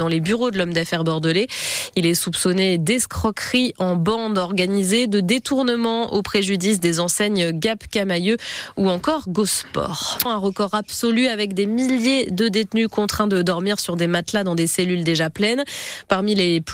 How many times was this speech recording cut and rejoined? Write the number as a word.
one